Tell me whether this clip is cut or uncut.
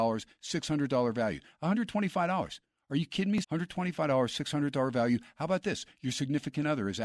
cut